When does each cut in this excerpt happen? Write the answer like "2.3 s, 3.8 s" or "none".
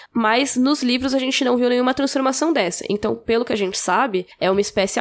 none